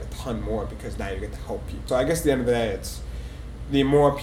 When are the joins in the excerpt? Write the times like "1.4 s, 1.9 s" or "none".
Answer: 1.9 s